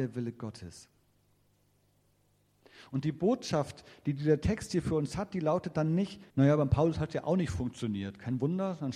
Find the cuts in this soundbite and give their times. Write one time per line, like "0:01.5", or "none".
0:06.3